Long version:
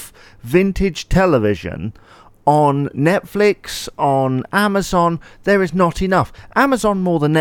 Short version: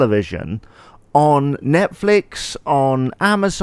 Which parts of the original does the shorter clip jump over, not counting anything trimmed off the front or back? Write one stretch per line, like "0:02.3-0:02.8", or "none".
none